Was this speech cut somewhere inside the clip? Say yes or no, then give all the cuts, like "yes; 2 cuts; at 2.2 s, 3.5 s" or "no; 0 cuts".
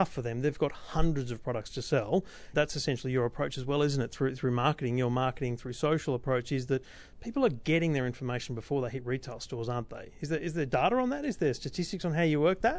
yes; 1 cut; at 2.5 s